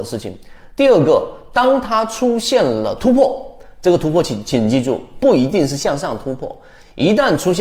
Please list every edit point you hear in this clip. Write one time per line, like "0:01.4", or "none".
none